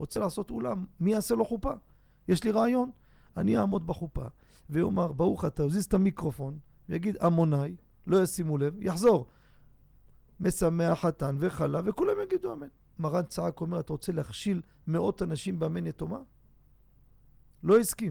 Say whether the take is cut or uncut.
uncut